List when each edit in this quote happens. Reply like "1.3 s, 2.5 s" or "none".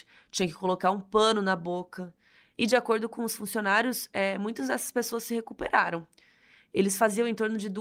2.5 s